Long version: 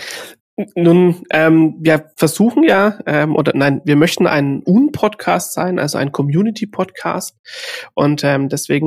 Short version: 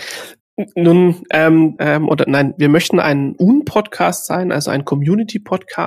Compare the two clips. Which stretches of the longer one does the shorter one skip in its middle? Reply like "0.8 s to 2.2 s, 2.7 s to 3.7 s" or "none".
1.8 s to 3.0 s

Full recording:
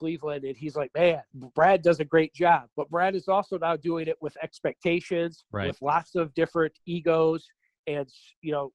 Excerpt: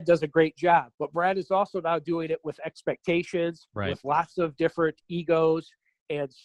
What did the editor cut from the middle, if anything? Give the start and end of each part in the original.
none

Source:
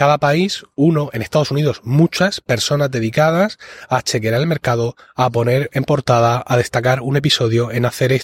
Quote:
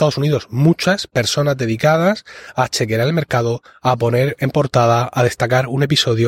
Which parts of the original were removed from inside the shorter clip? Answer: none

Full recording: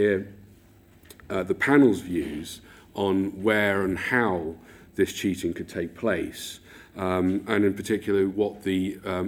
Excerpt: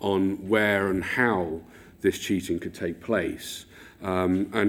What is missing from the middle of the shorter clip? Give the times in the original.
none

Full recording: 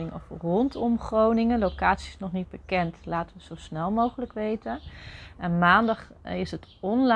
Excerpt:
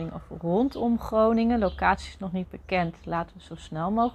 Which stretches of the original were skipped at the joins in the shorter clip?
none

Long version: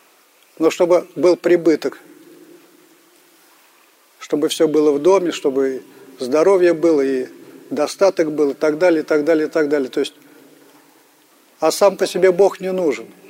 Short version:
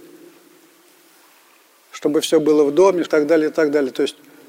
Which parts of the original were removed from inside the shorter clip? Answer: 5.3 s to 9.0 s

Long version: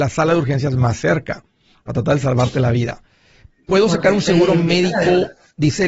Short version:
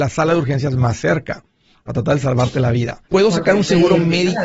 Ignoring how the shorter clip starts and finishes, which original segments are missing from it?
3.1 s to 3.6 s

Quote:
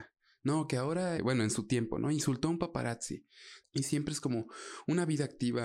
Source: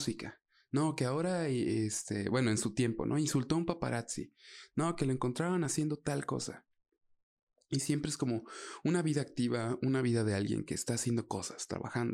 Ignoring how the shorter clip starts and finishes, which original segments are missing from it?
1.4 s to 2.2 s, 4.7 s to 7.6 s

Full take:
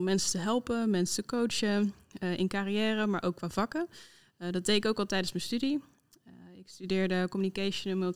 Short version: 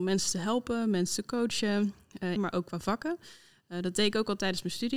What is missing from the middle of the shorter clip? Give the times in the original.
2.4 s to 3.1 s

